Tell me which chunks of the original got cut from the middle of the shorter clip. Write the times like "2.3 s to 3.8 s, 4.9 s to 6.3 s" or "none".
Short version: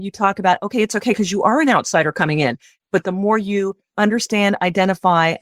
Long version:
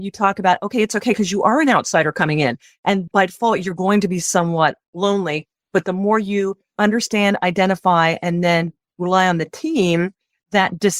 2.8 s to 5.6 s